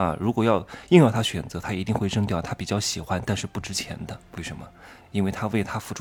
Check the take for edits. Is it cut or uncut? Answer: cut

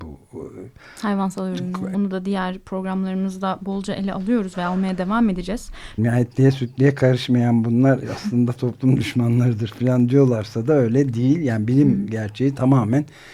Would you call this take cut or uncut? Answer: cut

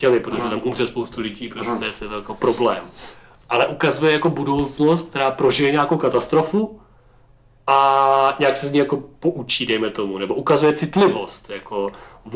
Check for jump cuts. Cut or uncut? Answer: uncut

